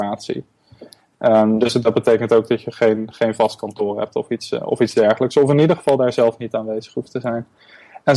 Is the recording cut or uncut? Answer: uncut